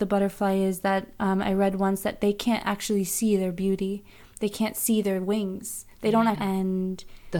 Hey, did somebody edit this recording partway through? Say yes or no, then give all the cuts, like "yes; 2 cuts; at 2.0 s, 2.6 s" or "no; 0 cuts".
yes; 1 cut; at 6.3 s